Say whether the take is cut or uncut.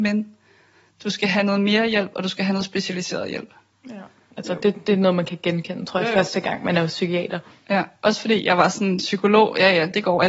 cut